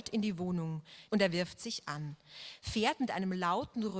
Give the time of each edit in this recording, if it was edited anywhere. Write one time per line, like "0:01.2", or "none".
0:01.1